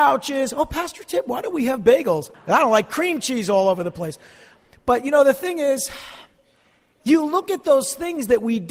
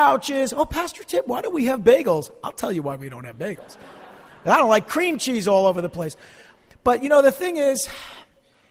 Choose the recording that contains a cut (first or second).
first